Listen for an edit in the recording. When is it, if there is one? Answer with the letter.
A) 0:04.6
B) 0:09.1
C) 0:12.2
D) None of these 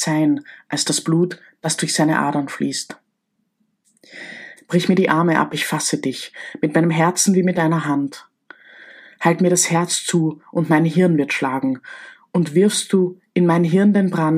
A